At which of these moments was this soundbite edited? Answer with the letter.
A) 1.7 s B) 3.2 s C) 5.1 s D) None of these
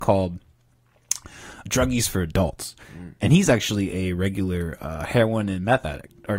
A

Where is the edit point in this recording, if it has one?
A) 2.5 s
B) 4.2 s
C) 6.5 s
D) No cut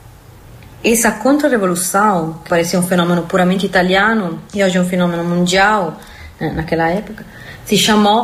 A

